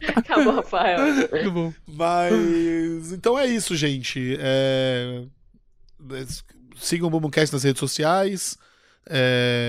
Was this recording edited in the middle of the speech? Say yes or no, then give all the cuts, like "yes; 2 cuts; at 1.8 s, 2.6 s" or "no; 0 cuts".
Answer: yes; 1 cut; at 1.4 s